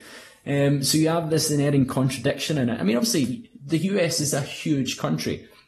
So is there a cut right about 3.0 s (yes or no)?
no